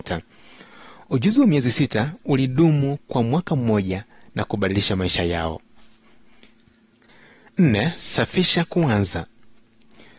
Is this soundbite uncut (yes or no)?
yes